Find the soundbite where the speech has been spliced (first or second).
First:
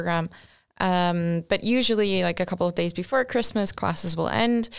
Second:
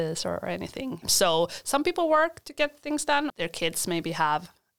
second